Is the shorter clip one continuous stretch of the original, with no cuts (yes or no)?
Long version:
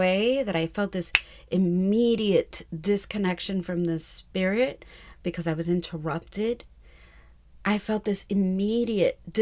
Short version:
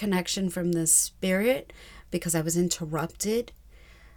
yes